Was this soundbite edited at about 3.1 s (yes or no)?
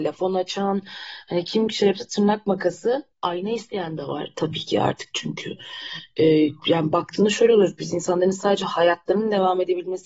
yes